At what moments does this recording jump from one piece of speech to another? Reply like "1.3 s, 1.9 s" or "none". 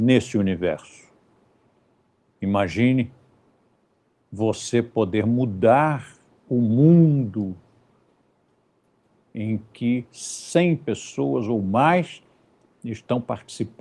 none